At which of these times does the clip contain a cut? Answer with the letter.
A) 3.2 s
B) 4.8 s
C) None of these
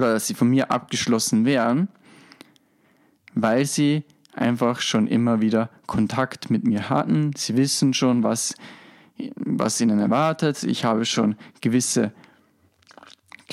C